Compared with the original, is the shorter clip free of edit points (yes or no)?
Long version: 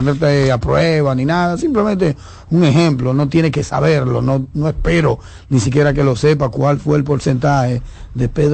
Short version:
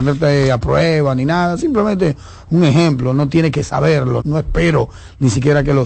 no